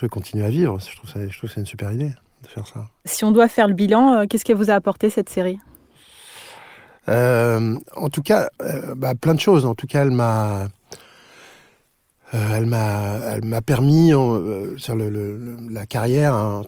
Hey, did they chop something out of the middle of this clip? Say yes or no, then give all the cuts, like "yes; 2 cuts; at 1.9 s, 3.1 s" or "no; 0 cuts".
no; 0 cuts